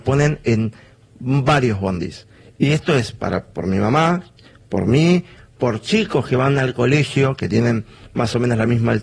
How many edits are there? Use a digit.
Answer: 0